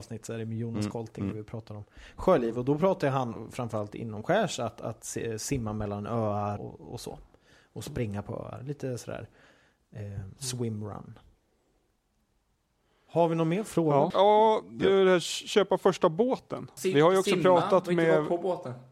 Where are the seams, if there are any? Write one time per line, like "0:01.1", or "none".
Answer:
0:06.6
0:14.1
0:16.8